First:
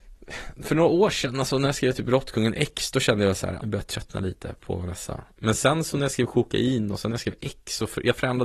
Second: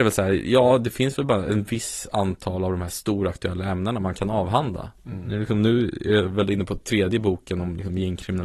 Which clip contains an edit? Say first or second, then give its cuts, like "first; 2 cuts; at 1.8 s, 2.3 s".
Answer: first; 1 cut; at 3.6 s